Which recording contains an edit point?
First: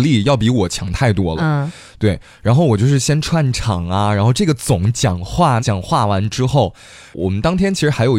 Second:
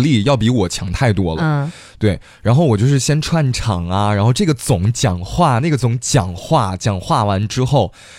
first; 1 cut; at 5.6 s

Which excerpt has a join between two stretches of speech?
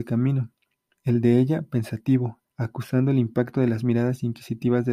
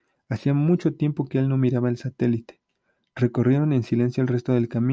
first; 1 cut; at 2.4 s

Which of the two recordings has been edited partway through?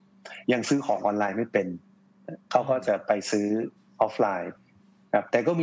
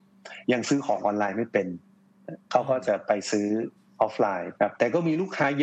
second; 1 cut; at 4.6 s

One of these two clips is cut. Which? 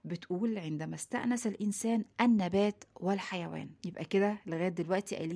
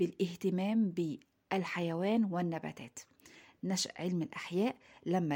first; 1 cut; at 3.8 s

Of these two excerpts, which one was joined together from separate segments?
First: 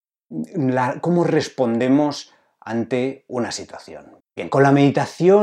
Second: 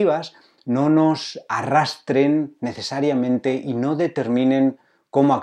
first; 1 cut; at 4.2 s

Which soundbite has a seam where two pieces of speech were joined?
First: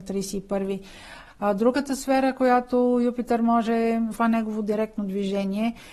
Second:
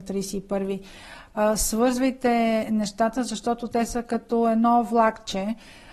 first; 2 cuts; at 1.3 s, 4.1 s

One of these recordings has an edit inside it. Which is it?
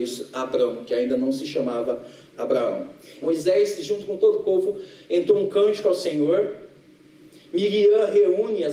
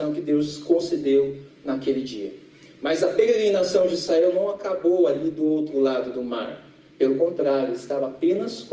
first; 1 cut; at 3.2 s

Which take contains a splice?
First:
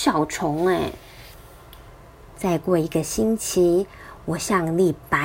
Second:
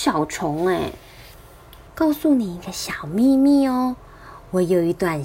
second; 1 cut; at 1.9 s

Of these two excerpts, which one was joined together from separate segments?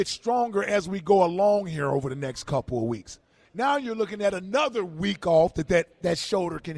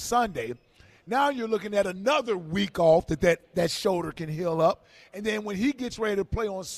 first; 1 cut; at 3.4 s

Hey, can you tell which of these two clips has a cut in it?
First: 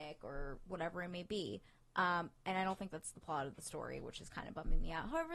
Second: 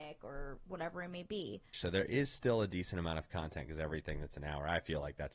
second; 1 cut; at 1.7 s

